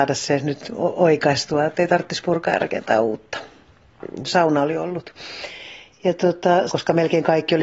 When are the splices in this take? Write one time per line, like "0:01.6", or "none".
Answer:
0:04.3
0:06.7